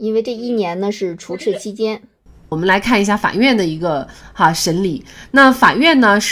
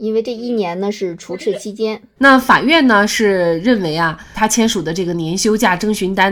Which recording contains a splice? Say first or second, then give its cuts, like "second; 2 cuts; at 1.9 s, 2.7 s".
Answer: second; 2 cuts; at 2.2 s, 4.3 s